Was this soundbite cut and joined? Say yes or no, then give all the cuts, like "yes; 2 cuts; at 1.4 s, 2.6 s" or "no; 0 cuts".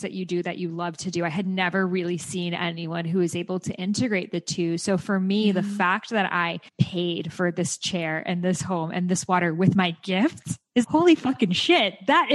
yes; 2 cuts; at 6.7 s, 10.8 s